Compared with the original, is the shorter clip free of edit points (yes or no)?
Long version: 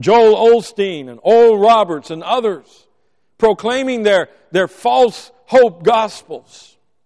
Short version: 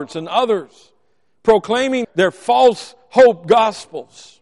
no